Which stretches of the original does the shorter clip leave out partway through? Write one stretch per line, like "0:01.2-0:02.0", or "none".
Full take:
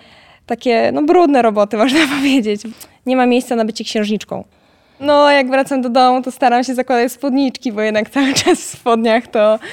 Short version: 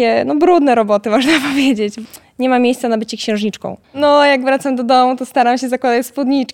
0:04.5-0:04.9